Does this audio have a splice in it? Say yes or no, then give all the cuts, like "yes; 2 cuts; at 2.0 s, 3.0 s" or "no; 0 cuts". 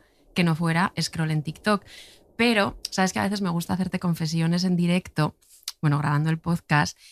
no; 0 cuts